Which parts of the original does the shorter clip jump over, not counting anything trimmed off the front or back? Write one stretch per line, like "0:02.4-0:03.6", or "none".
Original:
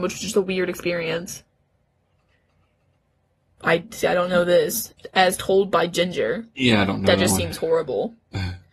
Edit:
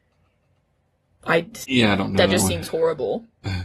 0:04.0-0:06.5